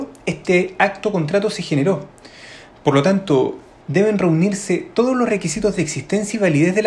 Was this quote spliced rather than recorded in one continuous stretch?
yes; 1 cut; at 3.8 s

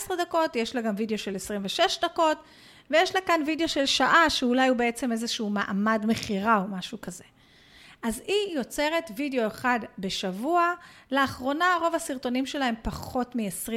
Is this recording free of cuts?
yes; 0 cuts

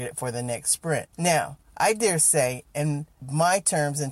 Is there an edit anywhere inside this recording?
yes; 1 cut; at 1.1 s

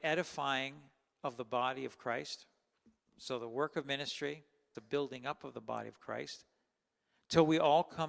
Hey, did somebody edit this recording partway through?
yes; 1 cut; at 4.7 s

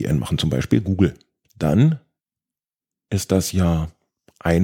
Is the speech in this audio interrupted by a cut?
yes; 1 cut; at 1.4 s

